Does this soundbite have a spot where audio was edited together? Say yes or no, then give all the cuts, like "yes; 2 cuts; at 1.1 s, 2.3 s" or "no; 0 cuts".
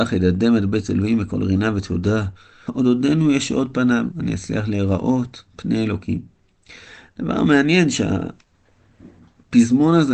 yes; 2 cuts; at 2.7 s, 4.1 s